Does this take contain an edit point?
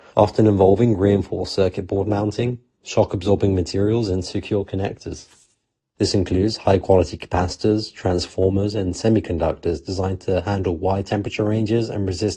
yes; 1 cut; at 6.0 s

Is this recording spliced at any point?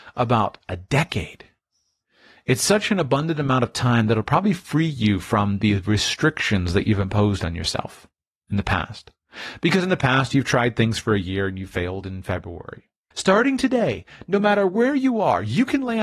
yes; 1 cut; at 13.1 s

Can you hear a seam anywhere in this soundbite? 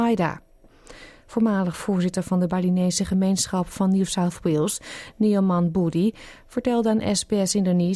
no; 0 cuts

